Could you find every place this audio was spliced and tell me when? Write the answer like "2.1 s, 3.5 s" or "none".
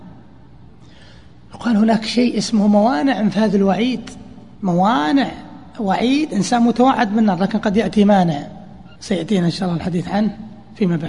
4.5 s, 8.9 s

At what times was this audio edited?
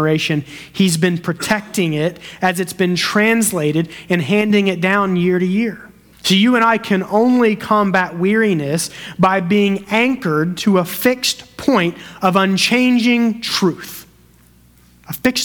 6.1 s

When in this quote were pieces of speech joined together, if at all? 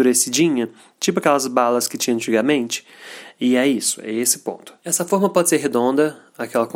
4.8 s

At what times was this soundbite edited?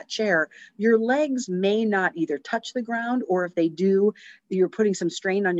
none

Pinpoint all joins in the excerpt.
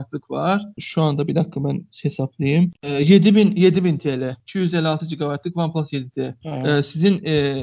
none

